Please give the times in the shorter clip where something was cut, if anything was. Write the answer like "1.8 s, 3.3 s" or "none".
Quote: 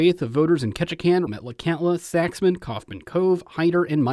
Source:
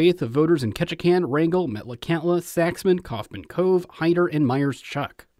1.3 s